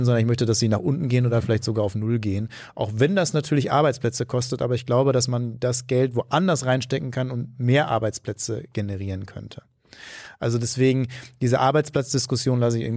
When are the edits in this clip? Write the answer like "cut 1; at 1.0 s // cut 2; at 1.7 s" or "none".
none